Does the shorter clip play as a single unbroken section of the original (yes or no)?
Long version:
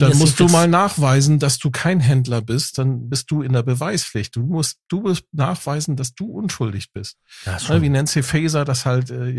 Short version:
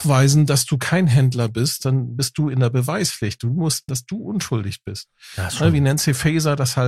no